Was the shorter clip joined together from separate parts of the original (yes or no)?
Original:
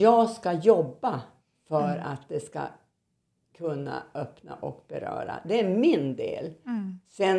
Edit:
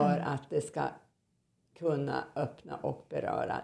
no